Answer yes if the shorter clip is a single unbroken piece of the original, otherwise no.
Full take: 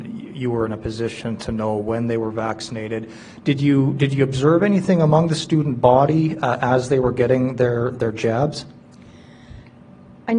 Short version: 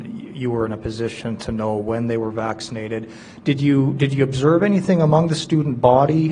yes